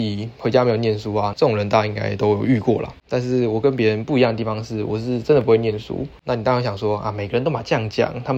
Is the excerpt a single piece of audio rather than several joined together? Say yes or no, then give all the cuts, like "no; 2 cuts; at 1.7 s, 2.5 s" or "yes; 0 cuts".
no; 1 cut; at 1.3 s